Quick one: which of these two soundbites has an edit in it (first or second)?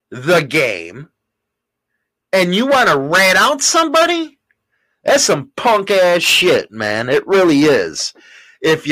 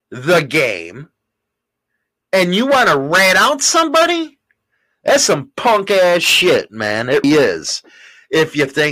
second